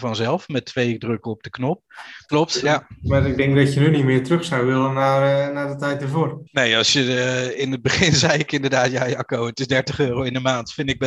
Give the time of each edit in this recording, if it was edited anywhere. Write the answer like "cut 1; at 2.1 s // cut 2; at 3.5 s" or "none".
cut 1; at 2.3 s // cut 2; at 6.5 s

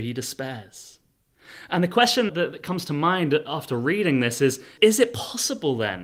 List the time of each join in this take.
cut 1; at 2.3 s // cut 2; at 4.8 s

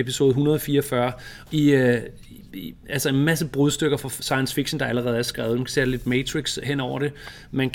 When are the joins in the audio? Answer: cut 1; at 1.5 s

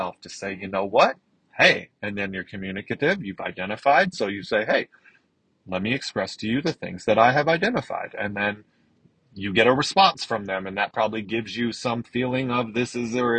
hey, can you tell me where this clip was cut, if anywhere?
none

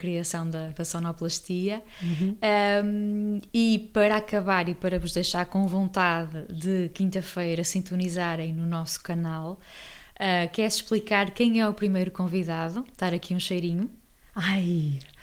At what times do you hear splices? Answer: none

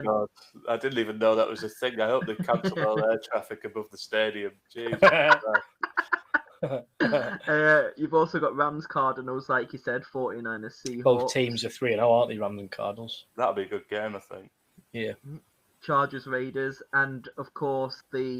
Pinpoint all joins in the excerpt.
none

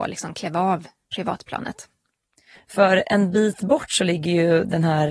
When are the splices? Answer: cut 1; at 2.5 s

